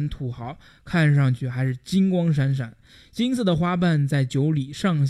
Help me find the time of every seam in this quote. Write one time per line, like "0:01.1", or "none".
none